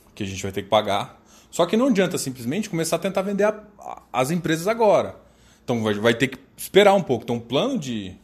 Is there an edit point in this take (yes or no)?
no